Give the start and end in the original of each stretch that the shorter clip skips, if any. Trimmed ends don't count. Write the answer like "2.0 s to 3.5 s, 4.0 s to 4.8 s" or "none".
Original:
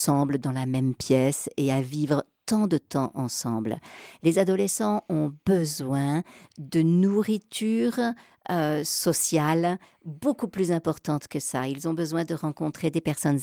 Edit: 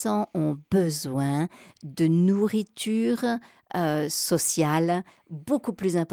none